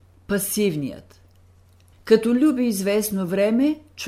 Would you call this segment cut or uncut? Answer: cut